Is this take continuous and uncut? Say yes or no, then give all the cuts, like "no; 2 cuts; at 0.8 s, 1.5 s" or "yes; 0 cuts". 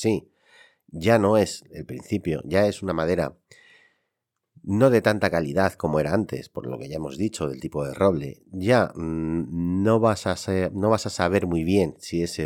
yes; 0 cuts